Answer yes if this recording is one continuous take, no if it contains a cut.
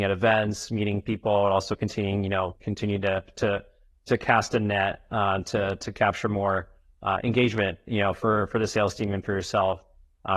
yes